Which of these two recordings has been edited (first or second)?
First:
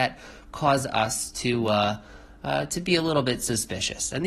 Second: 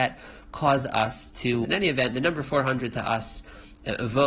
second